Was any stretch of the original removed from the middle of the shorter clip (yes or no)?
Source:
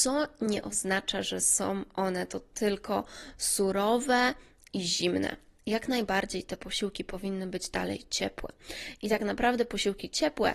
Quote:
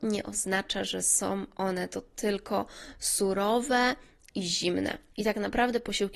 yes